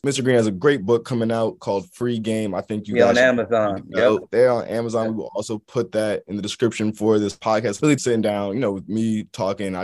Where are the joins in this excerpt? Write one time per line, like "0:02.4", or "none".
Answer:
0:08.0